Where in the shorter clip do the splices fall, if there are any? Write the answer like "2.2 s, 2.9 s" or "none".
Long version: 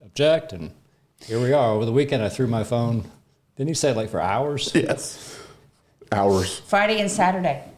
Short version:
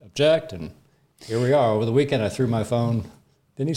none